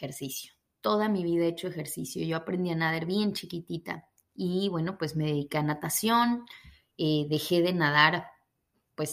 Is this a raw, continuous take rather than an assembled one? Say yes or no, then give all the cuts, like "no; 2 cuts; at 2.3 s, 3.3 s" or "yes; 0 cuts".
yes; 0 cuts